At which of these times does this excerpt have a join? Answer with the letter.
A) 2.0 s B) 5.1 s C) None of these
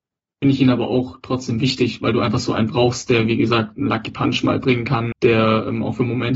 B